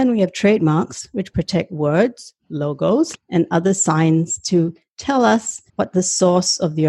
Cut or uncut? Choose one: cut